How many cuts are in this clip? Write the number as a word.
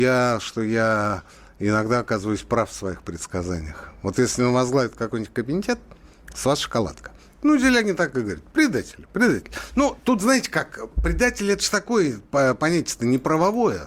one